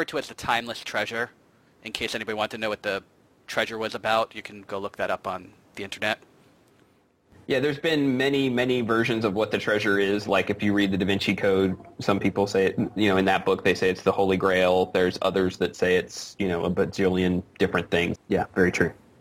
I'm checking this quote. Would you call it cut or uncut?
cut